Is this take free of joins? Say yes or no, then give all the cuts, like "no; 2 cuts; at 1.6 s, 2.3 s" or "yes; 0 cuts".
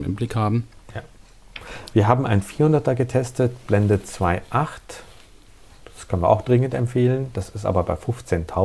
no; 1 cut; at 1.9 s